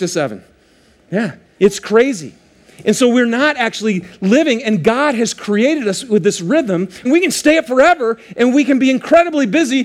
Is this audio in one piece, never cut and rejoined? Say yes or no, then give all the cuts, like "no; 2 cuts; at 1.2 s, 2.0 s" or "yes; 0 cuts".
no; 2 cuts; at 1.5 s, 7.0 s